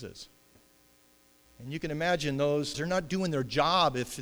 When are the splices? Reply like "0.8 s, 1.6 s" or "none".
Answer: 1.5 s, 2.7 s